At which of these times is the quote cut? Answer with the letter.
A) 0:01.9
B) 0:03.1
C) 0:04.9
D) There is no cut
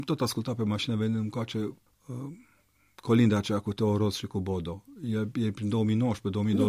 A